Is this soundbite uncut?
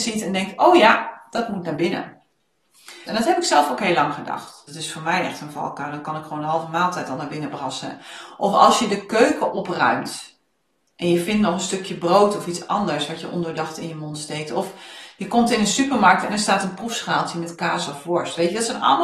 no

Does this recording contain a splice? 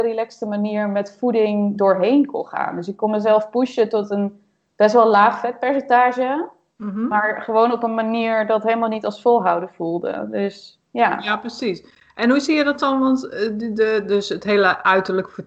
no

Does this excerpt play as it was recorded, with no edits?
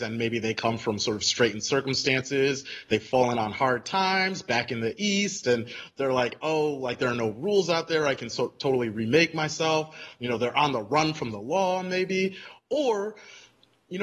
yes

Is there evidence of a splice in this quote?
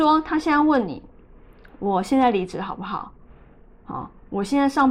no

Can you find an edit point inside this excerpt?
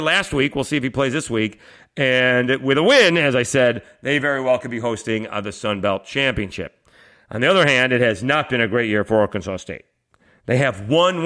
no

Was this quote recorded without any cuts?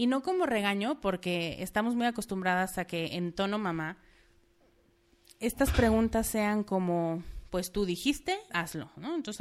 no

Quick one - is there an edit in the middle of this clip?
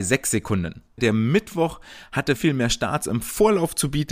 yes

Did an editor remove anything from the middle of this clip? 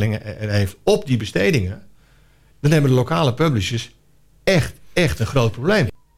yes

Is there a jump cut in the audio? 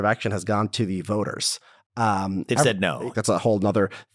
yes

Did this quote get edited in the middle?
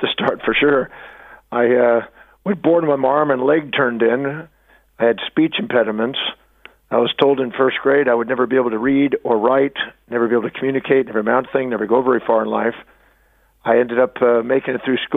no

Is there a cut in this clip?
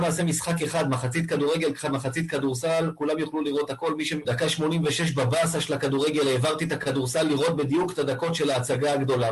yes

